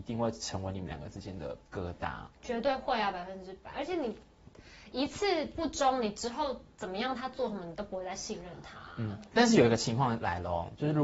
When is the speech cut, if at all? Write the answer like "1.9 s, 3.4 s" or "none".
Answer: 1.6 s